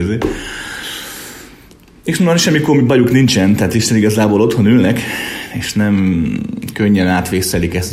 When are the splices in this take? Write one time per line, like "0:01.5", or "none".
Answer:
none

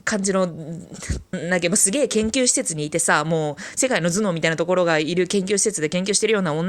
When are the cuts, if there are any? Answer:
0:01.3

